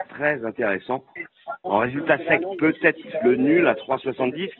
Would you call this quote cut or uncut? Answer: cut